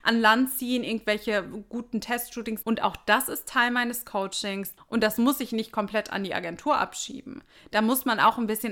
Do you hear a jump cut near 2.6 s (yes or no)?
yes